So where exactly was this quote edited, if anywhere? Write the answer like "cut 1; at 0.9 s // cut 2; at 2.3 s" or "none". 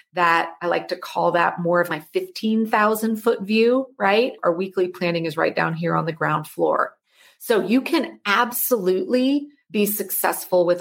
cut 1; at 1.9 s